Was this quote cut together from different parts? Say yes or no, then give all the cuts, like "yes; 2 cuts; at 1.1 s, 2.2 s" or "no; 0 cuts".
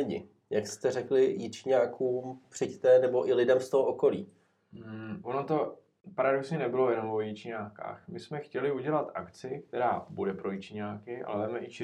no; 0 cuts